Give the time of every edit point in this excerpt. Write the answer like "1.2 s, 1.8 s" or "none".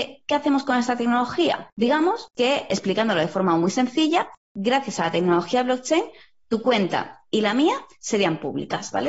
none